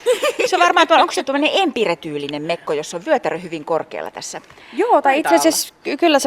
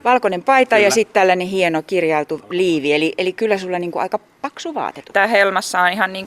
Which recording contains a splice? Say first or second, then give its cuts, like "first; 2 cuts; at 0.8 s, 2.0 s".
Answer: second; 1 cut; at 5.1 s